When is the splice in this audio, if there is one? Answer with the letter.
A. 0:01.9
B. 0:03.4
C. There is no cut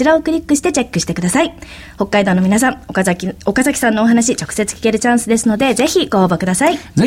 C